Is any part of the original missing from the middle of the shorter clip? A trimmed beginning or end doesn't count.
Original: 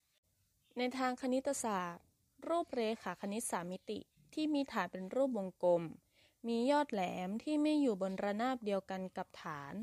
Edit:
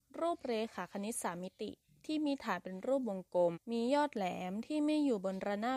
yes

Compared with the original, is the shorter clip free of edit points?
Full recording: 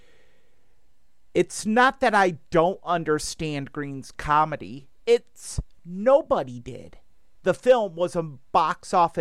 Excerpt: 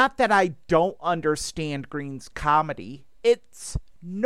yes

